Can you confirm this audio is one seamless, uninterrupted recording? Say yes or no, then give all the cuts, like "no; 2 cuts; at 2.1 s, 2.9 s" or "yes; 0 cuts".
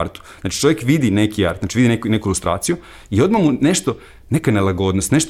yes; 0 cuts